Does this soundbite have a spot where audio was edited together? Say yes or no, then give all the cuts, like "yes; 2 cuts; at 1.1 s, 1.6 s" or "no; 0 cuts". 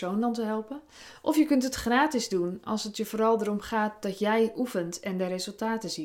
no; 0 cuts